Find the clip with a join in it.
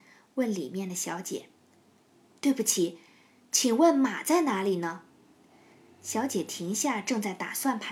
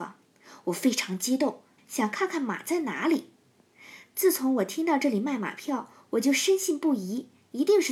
second; 1 cut; at 1.8 s

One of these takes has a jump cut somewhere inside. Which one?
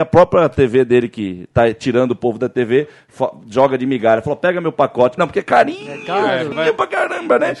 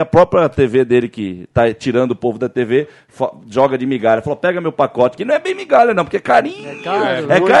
first; 2 cuts; at 5.2 s, 6.5 s

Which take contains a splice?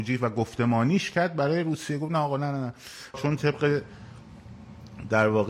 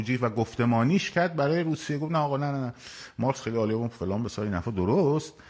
first; 1 cut; at 3.1 s

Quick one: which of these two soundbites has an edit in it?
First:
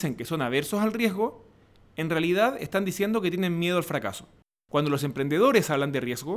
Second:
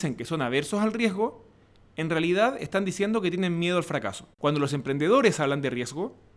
second; 1 cut; at 4.3 s

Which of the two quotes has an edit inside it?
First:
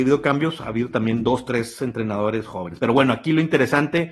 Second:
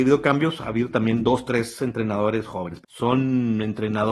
second; 1 cut; at 2.8 s

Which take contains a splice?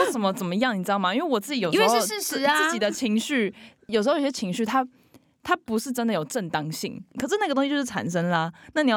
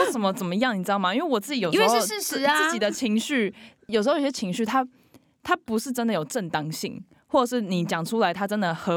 first; 1 cut; at 7.1 s

